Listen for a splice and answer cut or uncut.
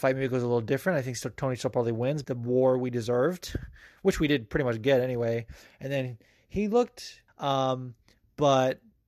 cut